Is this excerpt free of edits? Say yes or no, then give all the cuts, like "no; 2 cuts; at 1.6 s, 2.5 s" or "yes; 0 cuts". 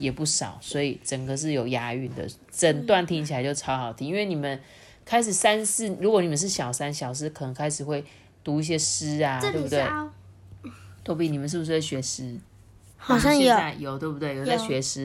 yes; 0 cuts